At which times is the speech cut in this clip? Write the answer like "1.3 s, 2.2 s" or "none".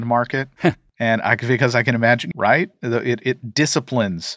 2.3 s